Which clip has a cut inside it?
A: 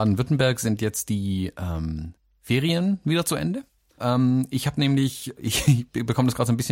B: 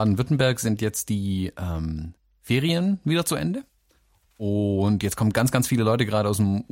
A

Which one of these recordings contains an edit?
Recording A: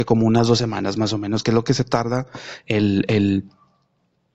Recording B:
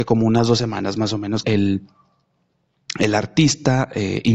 B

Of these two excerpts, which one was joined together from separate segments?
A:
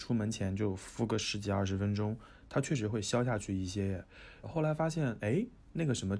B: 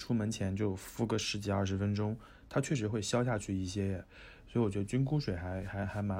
A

